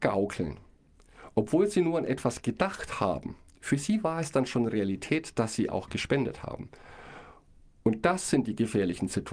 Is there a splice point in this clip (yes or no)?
no